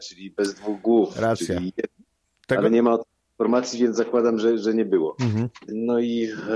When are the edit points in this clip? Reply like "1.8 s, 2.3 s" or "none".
none